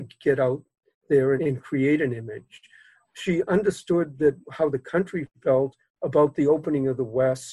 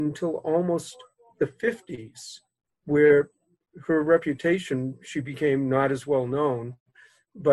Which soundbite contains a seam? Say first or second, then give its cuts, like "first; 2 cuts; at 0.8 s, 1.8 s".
first; 1 cut; at 1.4 s